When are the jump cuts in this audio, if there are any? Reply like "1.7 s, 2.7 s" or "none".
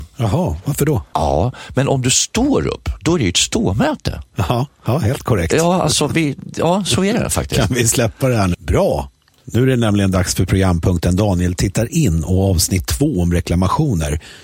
1.1 s, 8.5 s

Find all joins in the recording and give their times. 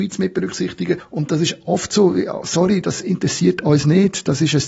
none

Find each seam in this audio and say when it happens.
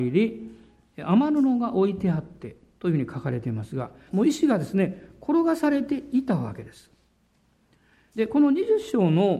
4.1 s

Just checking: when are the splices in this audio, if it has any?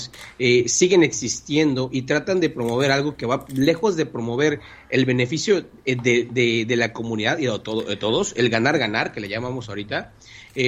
none

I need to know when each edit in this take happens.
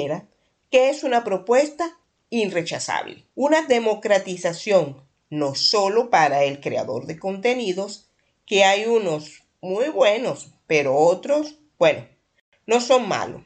3.3 s

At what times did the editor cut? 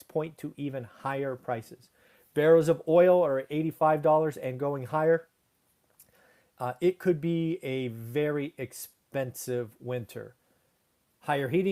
none

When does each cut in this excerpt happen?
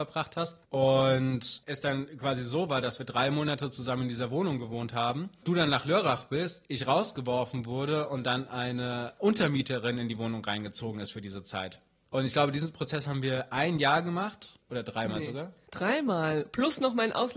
14.6 s

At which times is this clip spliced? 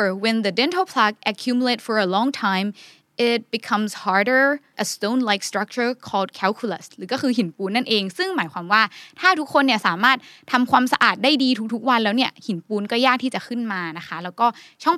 4.7 s

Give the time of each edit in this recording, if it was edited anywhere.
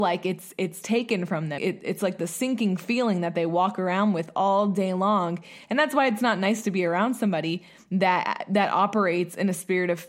1.6 s

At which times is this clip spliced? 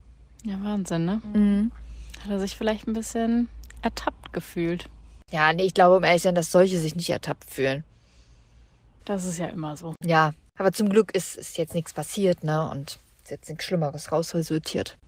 9.0 s

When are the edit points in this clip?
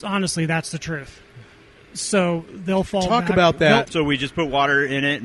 3.9 s

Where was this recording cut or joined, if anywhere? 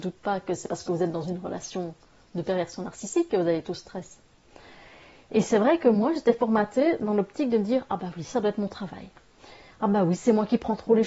none

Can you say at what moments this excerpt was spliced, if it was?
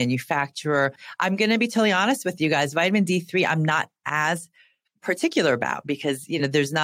none

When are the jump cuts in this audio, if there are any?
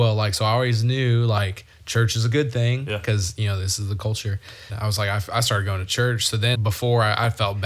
4.7 s, 6.5 s

